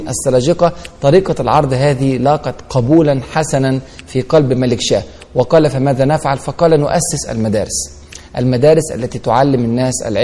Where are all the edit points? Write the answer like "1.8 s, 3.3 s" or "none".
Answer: none